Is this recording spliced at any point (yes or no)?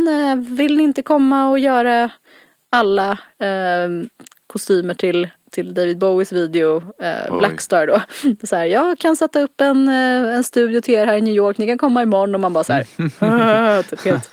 no